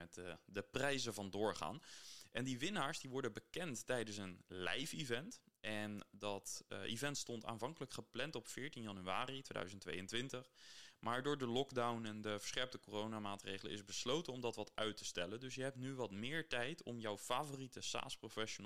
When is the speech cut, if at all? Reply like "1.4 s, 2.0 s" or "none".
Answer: none